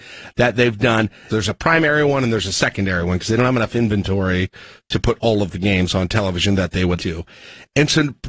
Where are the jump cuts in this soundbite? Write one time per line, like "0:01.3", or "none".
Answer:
0:01.3
0:07.0